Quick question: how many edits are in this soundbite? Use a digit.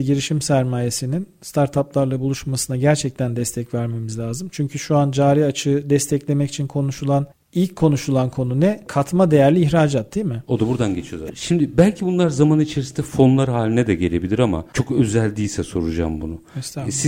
1